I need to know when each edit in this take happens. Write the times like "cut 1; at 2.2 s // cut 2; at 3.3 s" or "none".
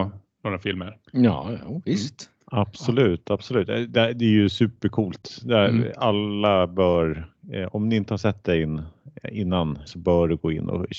cut 1; at 9.9 s

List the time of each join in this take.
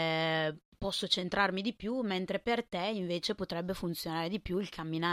none

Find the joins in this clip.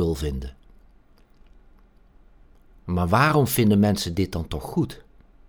none

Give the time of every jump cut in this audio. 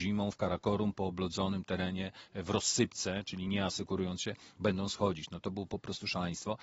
none

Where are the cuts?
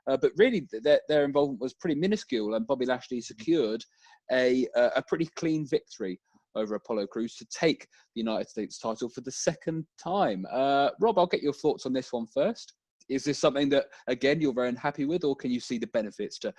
none

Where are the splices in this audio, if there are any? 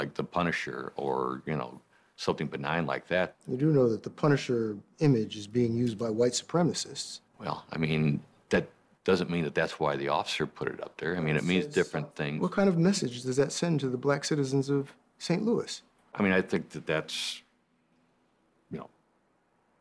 cut 1; at 7.3 s

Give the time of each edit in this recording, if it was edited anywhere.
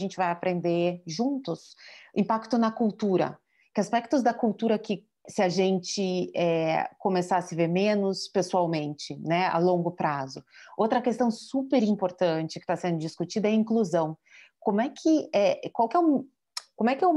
cut 1; at 5.3 s

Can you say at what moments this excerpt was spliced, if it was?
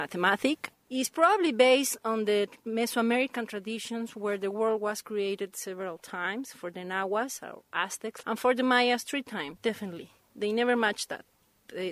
cut 1; at 8.2 s // cut 2; at 9.6 s

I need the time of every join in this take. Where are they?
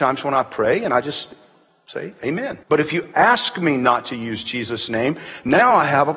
cut 1; at 2.6 s

